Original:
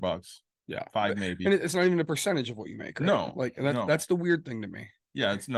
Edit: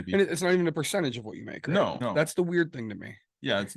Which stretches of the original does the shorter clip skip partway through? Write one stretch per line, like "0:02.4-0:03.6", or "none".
0:03.3-0:03.7